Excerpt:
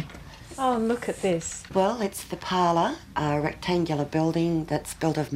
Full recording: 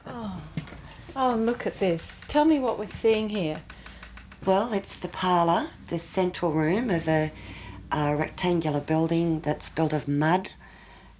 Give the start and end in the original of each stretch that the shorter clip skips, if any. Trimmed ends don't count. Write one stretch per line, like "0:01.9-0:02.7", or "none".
0:02.3-0:04.4
0:05.8-0:07.9